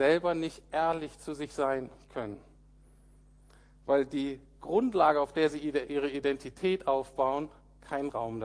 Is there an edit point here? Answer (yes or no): no